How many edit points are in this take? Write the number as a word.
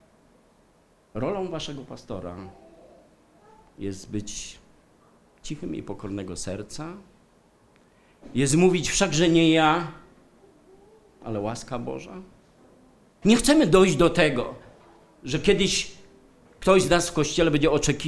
one